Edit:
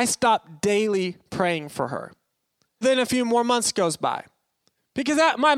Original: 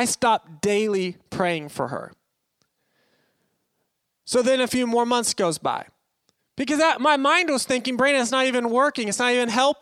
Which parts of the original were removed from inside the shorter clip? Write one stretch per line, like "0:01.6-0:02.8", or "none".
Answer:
0:02.8-0:04.4